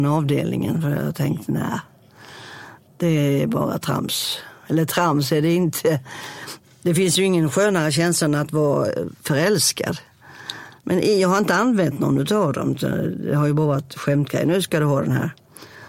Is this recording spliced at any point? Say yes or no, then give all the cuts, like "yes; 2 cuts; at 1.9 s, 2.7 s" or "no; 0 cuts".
yes; 1 cut; at 10.8 s